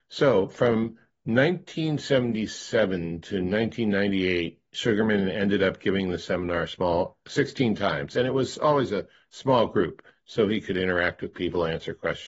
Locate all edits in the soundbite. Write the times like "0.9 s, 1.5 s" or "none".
none